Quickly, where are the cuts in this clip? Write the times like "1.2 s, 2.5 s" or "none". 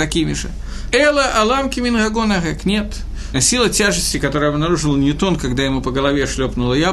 0.9 s, 3.3 s